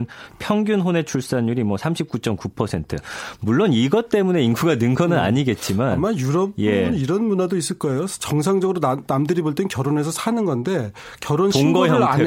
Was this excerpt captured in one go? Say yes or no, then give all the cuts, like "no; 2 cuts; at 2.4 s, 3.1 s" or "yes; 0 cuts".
yes; 0 cuts